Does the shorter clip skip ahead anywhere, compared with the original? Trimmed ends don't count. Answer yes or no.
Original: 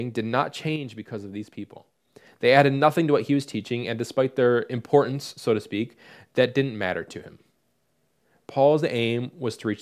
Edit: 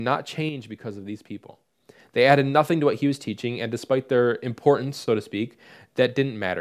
yes